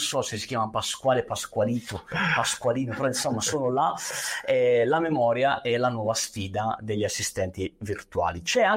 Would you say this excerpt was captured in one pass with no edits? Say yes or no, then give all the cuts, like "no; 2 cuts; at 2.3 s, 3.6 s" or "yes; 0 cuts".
yes; 0 cuts